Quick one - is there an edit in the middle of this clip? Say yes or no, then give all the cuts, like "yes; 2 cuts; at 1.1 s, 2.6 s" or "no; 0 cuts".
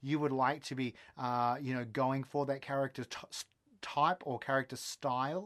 no; 0 cuts